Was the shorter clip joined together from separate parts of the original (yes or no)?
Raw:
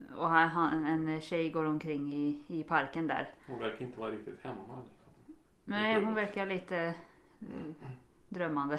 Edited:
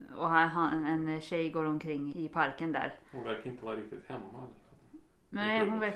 yes